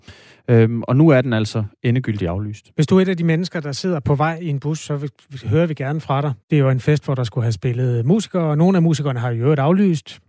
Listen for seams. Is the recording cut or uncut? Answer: cut